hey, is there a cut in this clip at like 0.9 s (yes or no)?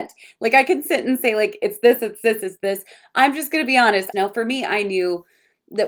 no